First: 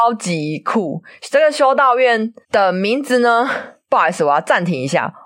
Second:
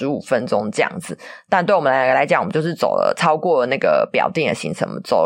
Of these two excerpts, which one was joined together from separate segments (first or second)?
first